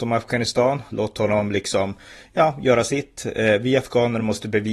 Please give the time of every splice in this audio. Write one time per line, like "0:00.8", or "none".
none